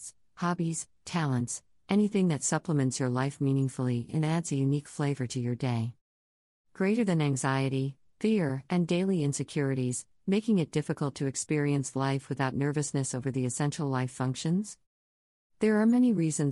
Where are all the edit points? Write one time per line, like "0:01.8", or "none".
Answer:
none